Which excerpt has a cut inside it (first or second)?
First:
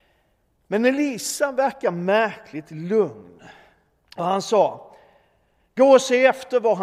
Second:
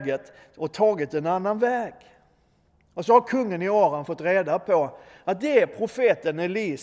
first